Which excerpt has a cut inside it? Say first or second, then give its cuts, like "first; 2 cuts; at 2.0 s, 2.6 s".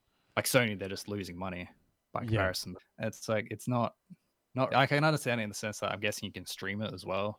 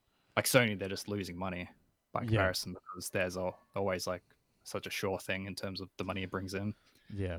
first; 2 cuts; at 2.8 s, 4.7 s